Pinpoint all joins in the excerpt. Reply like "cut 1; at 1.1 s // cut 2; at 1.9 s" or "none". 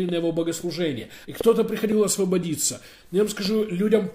cut 1; at 1.2 s